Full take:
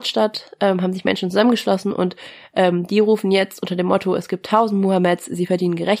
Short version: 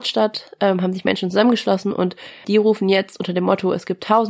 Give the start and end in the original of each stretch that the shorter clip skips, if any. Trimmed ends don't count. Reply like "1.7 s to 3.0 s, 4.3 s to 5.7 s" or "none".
2.4 s to 2.9 s